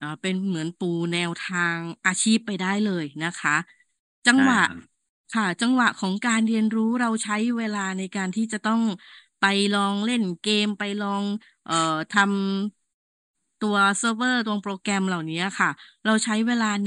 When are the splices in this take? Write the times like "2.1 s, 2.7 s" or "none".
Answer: none